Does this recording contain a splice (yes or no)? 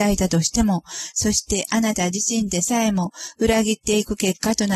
yes